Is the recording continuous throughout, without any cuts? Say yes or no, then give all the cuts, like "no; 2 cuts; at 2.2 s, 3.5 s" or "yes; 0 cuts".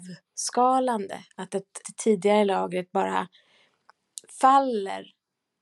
no; 1 cut; at 1.8 s